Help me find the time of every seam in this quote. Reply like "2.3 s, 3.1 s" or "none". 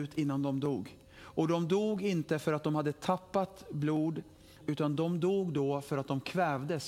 1.0 s, 4.6 s